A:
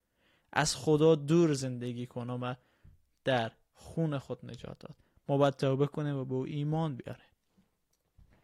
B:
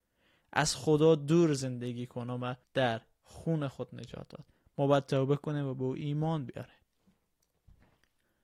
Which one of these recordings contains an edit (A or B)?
B